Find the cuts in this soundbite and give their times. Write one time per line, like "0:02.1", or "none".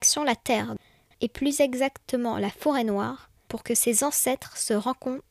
0:01.1